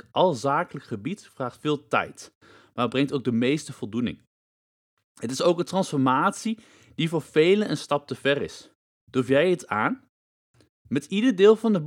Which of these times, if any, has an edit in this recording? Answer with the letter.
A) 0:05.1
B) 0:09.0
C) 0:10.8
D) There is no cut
B